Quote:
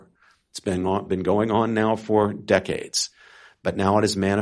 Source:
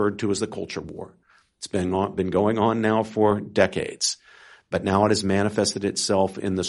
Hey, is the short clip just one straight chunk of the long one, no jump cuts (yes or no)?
yes